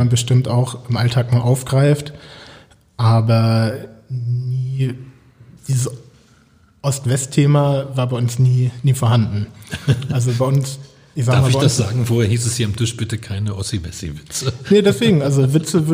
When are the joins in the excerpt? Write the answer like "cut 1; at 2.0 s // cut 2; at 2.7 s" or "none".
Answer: none

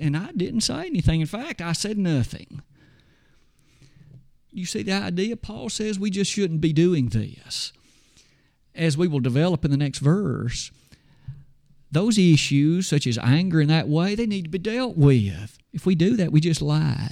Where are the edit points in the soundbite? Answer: cut 1; at 15.6 s

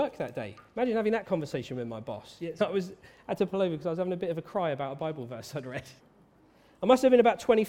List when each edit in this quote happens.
cut 1; at 2.6 s // cut 2; at 6.0 s

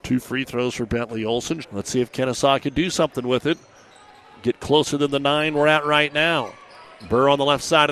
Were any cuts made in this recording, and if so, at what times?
cut 1; at 1.6 s

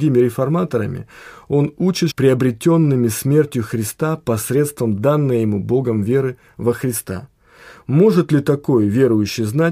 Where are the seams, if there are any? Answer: cut 1; at 2.1 s

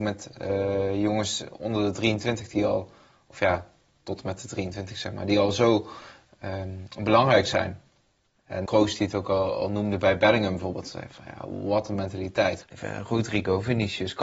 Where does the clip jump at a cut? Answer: cut 1; at 8.7 s // cut 2; at 12.6 s

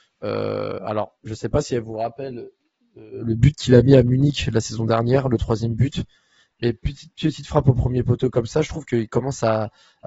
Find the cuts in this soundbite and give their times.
none

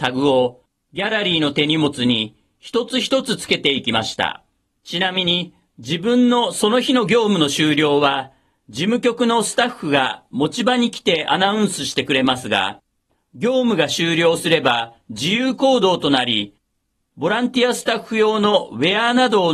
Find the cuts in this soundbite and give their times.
cut 1; at 4.8 s

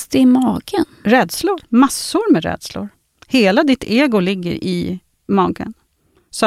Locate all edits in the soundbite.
cut 1; at 1.6 s

